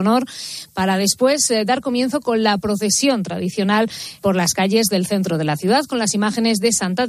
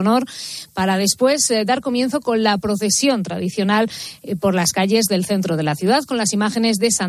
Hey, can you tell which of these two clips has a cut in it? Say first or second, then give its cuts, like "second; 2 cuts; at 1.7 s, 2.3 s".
first; 1 cut; at 4.2 s